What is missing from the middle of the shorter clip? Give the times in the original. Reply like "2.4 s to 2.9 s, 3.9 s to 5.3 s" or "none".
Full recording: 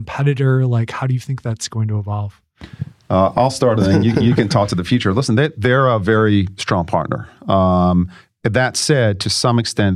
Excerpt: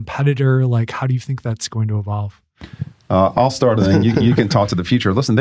none